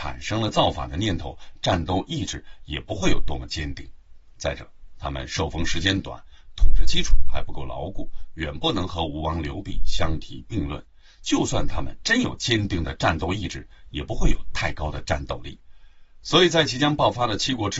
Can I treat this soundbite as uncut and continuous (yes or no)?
yes